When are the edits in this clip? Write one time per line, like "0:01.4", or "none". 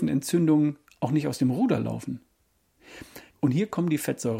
0:03.3